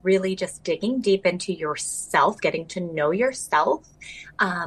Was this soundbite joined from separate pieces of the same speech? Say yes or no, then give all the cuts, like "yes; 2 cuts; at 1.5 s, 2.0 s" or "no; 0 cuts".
no; 0 cuts